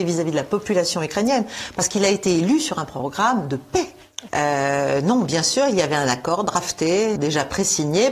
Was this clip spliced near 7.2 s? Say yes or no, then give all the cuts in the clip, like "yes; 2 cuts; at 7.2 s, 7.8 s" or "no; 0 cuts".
yes; 2 cuts; at 4.3 s, 7.2 s